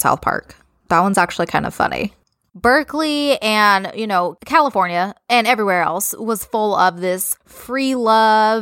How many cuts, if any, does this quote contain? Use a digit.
1